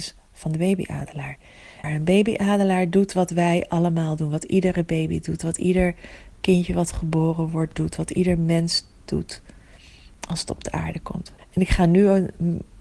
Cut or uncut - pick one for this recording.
cut